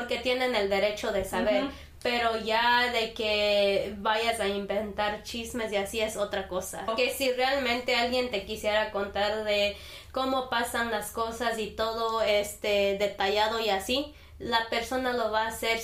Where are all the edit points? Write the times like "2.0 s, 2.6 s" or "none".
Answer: 6.9 s